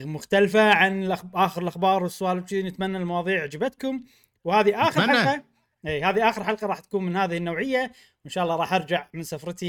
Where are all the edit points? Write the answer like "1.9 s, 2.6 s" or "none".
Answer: none